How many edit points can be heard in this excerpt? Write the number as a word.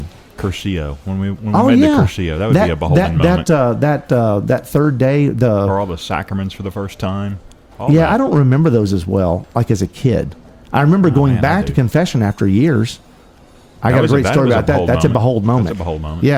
zero